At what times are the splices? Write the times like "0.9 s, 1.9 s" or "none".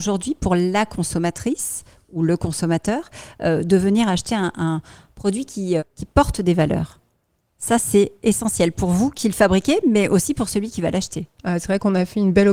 5.8 s, 11.4 s